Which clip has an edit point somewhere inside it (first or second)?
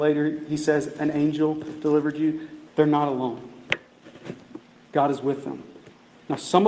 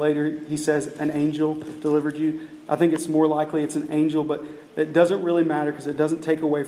first